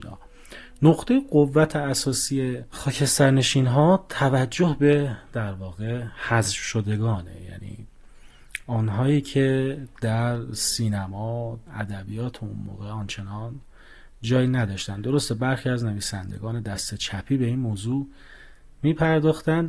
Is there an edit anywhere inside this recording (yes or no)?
yes